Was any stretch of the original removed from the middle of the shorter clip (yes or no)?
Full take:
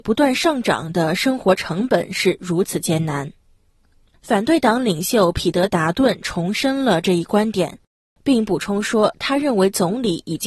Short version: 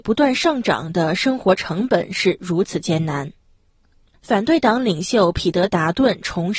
no